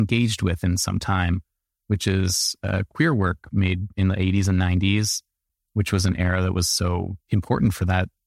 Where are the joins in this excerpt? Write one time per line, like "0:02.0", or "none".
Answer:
0:07.2